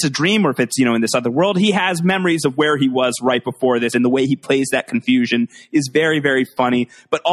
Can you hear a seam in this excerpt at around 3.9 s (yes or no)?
yes